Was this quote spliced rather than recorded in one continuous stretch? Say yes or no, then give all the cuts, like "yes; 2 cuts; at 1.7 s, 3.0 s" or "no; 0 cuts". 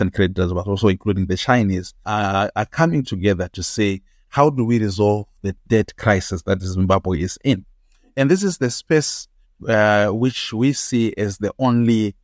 yes; 1 cut; at 2.0 s